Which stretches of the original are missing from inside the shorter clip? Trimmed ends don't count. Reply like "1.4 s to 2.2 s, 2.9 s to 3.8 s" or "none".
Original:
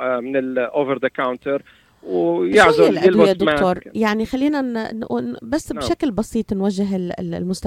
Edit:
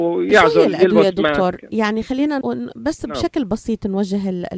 4.6 s to 5.1 s